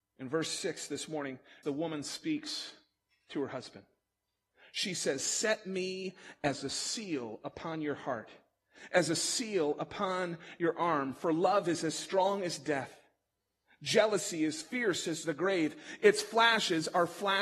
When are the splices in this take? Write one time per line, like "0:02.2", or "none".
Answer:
0:01.6